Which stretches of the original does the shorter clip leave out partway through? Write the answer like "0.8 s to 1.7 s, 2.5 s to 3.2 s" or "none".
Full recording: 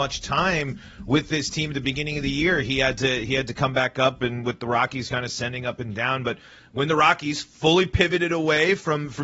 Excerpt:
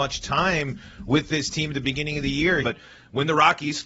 2.6 s to 6.2 s